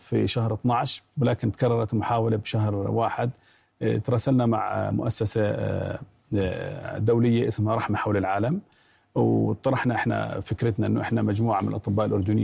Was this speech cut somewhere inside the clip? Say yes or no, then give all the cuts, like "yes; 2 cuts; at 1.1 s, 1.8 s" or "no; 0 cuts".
no; 0 cuts